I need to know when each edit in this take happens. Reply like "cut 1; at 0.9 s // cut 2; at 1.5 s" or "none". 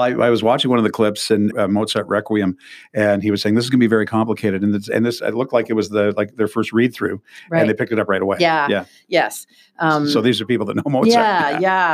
cut 1; at 1.5 s